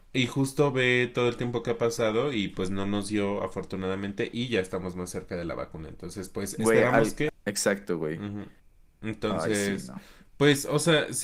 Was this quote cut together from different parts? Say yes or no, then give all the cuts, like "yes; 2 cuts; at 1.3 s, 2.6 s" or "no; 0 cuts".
yes; 1 cut; at 7.3 s